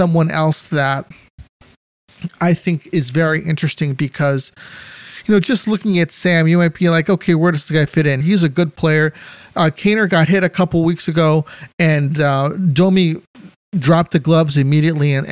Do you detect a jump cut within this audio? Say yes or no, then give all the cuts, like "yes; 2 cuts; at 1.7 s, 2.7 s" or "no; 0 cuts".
yes; 1 cut; at 8.2 s